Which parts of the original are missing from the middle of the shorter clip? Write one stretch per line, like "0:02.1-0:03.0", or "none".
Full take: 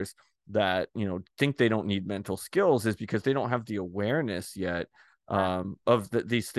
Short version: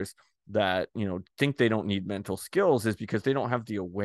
none